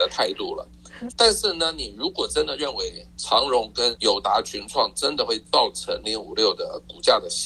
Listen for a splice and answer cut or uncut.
cut